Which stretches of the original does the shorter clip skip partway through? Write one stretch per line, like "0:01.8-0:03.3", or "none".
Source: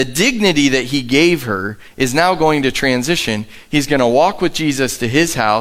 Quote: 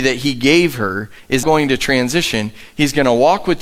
0:02.1-0:02.4

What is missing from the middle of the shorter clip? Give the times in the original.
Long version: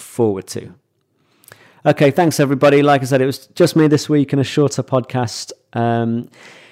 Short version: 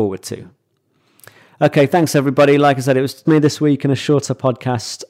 0:03.5-0:03.7

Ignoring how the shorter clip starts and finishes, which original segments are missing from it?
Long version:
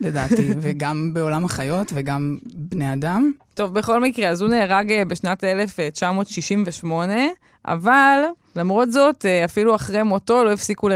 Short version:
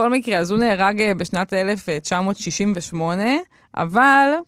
none

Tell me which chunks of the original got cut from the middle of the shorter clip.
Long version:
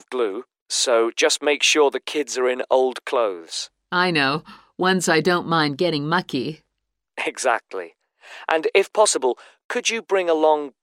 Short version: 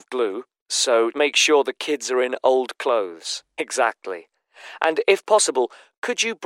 0:01.1-0:01.4
0:03.8-0:07.2

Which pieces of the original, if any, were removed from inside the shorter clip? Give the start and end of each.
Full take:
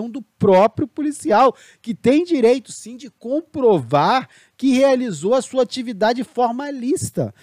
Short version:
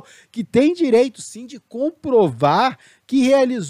none

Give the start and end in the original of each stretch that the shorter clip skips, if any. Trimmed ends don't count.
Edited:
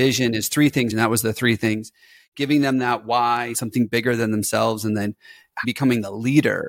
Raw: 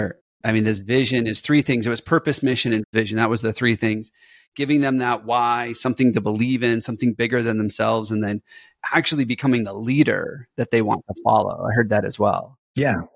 0:01.8-0:03.1
0:05.7-0:06.8
0:08.9-0:09.3

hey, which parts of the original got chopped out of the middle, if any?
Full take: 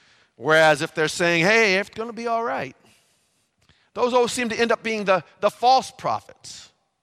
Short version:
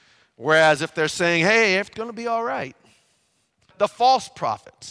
0:03.7-0:05.3

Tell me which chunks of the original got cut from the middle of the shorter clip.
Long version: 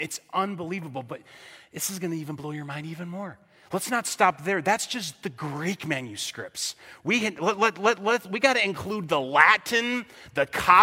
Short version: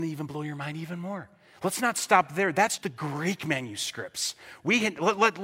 0:04.9-0:05.2

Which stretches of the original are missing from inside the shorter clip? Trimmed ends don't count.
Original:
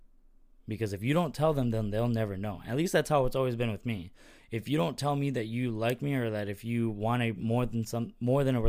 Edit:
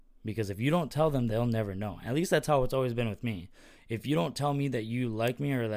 0:01.7-0:01.9

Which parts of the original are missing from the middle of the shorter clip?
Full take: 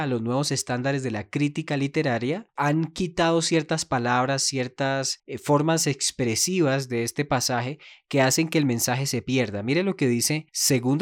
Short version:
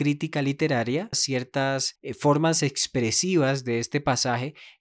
0:02.5-0:04.4

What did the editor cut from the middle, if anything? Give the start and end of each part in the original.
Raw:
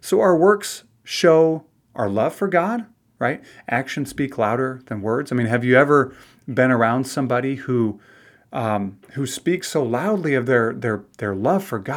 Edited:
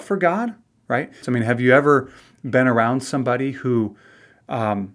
0:03.5-0:05.3

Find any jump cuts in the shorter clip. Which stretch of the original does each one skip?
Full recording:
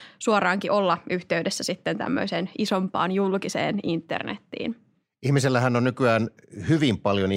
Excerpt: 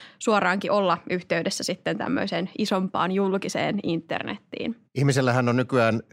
0:04.9-0:05.1

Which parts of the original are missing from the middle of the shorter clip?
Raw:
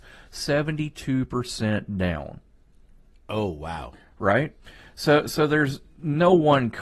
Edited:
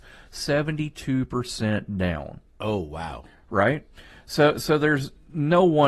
0:02.5-0:03.2

